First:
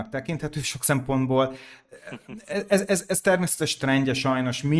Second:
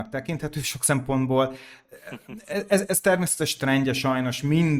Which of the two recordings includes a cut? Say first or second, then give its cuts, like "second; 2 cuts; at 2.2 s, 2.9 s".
second; 1 cut; at 2.9 s